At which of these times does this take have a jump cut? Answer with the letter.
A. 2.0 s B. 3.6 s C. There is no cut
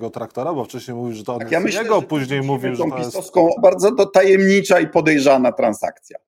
B